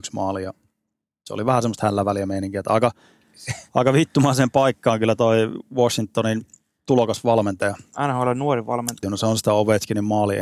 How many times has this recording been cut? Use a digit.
1